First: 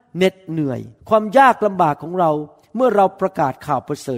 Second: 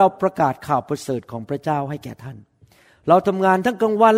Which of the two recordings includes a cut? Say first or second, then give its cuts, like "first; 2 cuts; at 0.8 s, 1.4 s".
first; 1 cut; at 1.0 s